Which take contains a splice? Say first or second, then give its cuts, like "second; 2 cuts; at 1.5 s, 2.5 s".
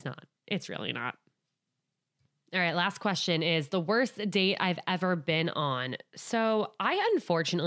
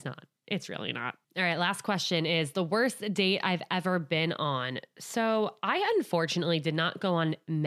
second; 1 cut; at 1.2 s